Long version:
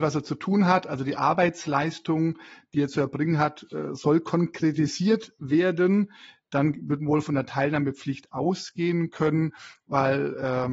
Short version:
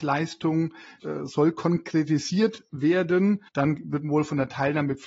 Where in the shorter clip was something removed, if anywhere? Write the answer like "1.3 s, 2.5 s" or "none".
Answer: 1.0 s, 3.5 s